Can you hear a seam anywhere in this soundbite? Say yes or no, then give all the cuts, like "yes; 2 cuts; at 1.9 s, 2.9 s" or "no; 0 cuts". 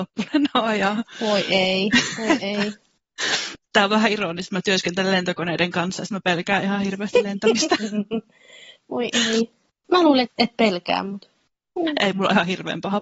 yes; 1 cut; at 10.2 s